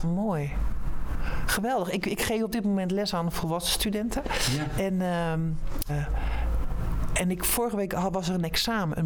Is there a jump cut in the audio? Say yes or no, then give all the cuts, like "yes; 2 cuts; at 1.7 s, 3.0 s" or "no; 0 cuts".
yes; 1 cut; at 5.9 s